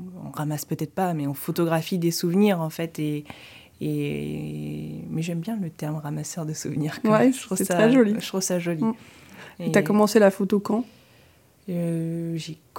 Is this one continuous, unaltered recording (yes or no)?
yes